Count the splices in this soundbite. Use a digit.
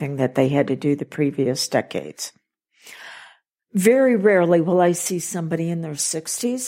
0